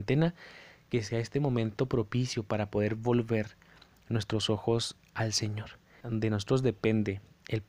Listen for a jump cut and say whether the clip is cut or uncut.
cut